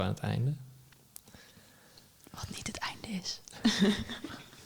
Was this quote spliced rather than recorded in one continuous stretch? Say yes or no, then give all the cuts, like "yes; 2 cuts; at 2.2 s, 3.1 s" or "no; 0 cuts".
no; 0 cuts